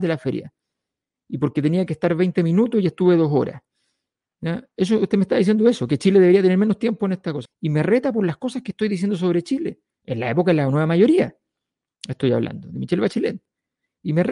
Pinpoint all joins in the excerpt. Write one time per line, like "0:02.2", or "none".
0:07.5